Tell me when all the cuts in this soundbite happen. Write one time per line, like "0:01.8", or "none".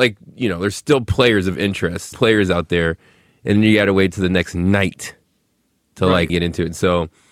0:02.1
0:06.3